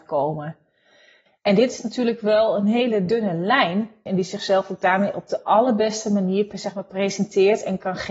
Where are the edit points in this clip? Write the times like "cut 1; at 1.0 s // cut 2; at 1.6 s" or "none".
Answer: cut 1; at 1.3 s // cut 2; at 4.1 s